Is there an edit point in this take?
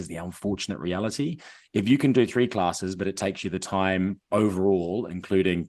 no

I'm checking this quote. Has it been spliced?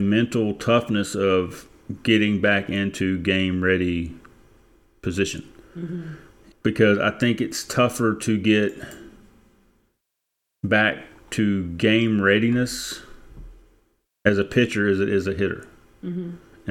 yes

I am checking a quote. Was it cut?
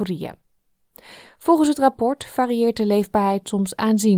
no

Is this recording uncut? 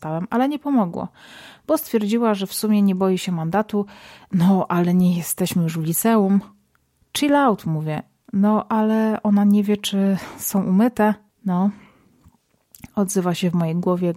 no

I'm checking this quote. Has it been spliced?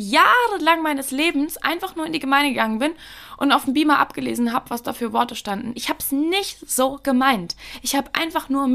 no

